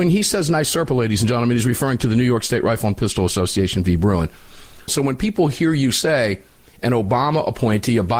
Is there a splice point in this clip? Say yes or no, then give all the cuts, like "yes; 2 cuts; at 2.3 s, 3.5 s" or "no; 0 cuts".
yes; 1 cut; at 4.9 s